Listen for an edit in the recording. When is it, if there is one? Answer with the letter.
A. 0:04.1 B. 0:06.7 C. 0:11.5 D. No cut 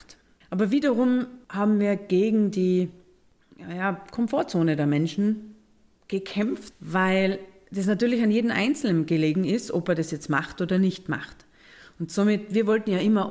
B